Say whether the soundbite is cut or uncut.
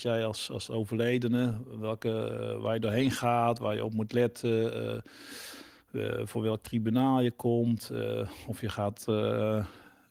uncut